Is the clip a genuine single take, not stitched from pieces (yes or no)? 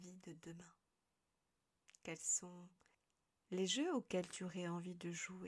yes